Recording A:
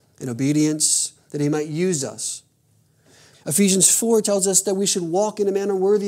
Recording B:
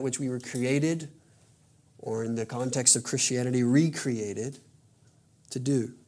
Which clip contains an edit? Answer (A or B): A